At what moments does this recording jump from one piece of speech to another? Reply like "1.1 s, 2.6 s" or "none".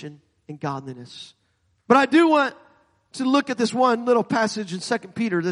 1.8 s